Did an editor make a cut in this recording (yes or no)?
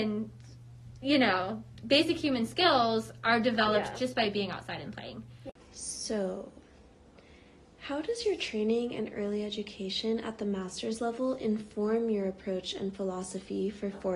no